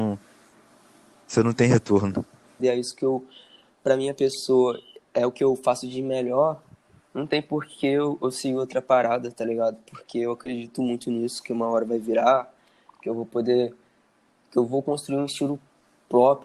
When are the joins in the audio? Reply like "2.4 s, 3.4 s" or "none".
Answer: 2.6 s